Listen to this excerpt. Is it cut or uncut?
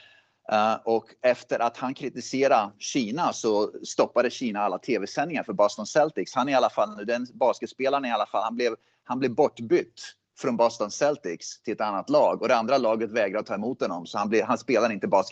uncut